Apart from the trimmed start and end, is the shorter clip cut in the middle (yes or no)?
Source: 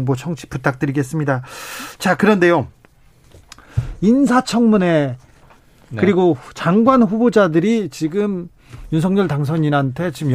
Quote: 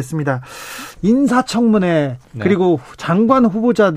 yes